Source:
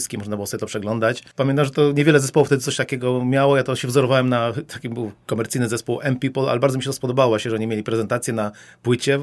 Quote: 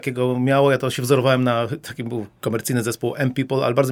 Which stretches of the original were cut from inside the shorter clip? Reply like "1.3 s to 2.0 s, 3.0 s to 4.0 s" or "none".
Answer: none

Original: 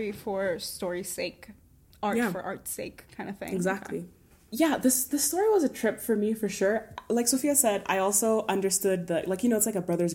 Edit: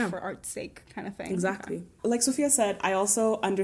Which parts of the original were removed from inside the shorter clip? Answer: 4.2 s to 7.0 s

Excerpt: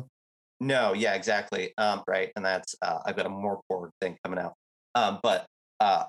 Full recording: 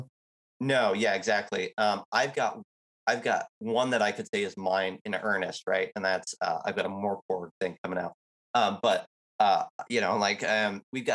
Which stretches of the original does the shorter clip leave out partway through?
2.0 s to 5.6 s

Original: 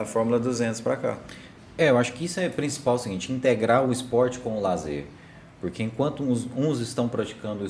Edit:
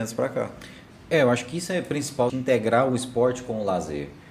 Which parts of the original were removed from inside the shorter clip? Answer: 3.0 s to 3.3 s

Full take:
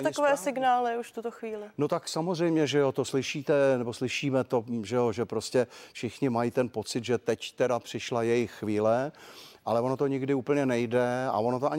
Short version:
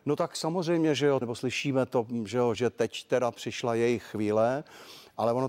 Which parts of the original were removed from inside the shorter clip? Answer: 2.9 s to 3.8 s, 5.1 s to 7.0 s

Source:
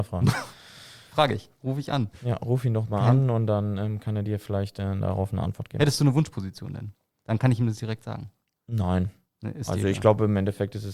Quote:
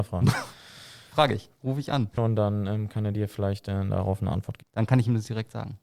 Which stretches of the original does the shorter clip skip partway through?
2.2 s to 3.3 s, 5.7 s to 7.1 s

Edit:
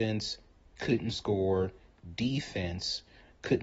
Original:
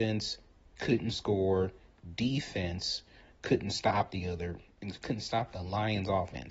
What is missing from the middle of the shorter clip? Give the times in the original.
none

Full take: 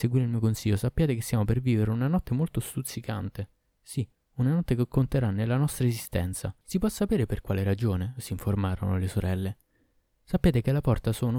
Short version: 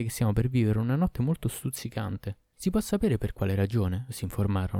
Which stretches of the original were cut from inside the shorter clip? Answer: 3.6 s to 6.6 s

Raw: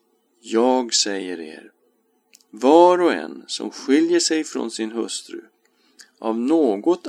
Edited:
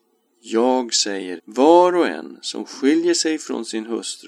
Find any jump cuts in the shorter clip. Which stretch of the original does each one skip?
1.4 s to 2.4 s

